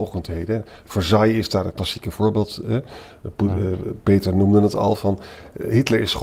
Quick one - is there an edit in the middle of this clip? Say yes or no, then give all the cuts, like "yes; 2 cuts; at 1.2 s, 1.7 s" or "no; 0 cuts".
no; 0 cuts